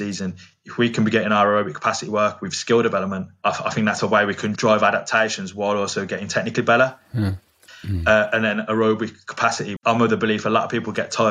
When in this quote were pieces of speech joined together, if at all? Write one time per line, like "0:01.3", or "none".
0:07.7
0:09.8